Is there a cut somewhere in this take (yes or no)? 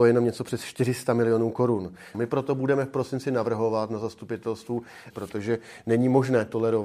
yes